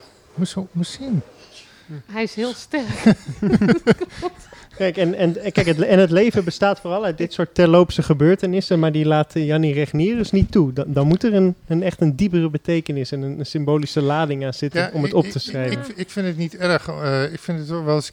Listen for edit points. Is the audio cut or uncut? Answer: uncut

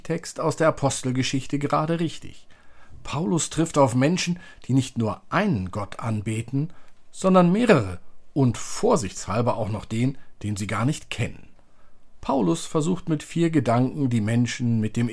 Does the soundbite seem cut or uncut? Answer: uncut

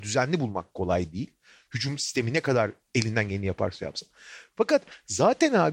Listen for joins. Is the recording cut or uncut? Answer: uncut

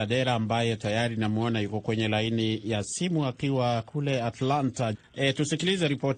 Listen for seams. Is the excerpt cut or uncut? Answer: cut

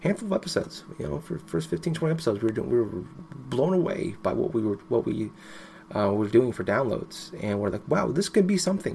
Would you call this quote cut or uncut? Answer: uncut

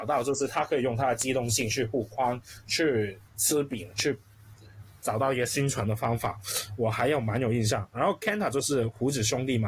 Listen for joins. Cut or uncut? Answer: uncut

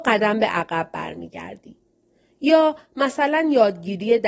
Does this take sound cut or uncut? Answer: uncut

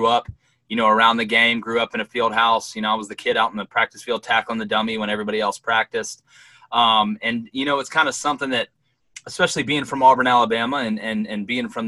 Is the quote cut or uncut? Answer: uncut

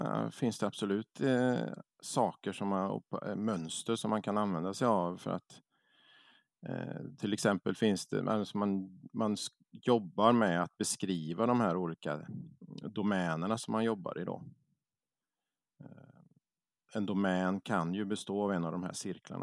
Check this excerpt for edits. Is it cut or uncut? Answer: uncut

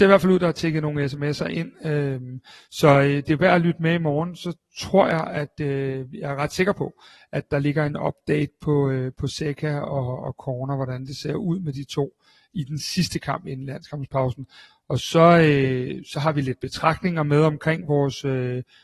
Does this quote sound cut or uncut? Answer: uncut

